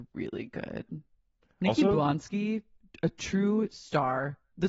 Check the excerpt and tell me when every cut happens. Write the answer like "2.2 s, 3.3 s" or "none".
none